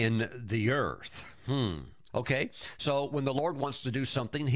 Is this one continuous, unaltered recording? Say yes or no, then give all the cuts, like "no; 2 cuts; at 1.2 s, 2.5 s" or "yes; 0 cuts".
no; 1 cut; at 2.1 s